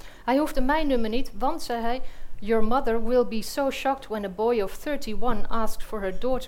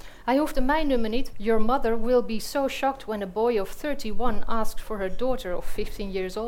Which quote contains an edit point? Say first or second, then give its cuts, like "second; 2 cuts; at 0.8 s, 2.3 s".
second; 1 cut; at 1.3 s